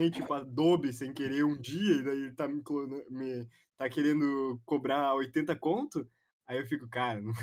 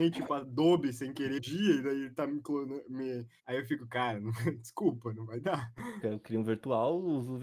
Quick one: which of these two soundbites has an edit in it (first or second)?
second